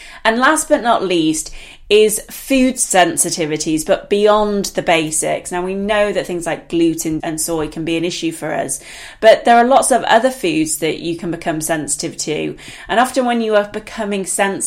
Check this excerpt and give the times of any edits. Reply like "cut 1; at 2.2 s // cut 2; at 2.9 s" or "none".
cut 1; at 7.2 s